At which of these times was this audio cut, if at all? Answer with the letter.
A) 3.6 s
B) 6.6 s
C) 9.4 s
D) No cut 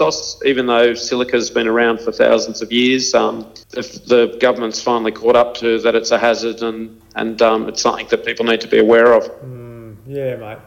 A